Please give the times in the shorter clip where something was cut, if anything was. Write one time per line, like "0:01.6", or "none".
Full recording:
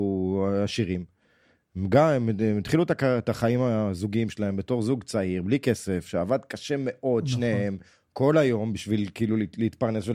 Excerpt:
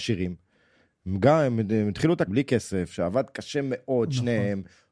0:02.3